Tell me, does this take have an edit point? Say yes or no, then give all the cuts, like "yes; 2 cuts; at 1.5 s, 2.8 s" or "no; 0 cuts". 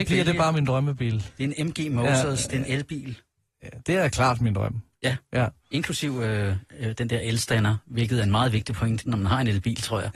no; 0 cuts